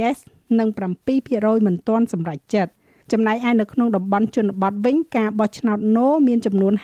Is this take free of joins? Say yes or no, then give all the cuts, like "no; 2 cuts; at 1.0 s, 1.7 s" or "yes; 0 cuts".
yes; 0 cuts